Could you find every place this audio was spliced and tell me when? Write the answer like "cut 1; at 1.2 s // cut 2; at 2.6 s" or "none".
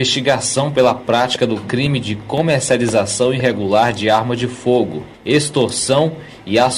cut 1; at 5.1 s